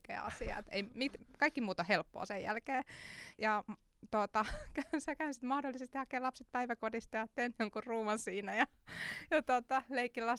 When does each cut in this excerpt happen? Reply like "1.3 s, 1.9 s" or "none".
3.3 s